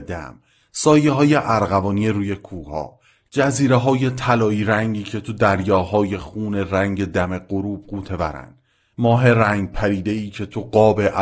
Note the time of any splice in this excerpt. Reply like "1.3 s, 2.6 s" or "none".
none